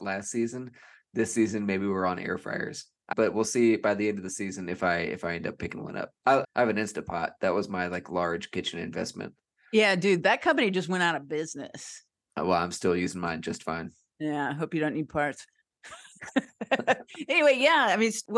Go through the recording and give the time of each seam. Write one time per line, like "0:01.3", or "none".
0:03.1
0:06.4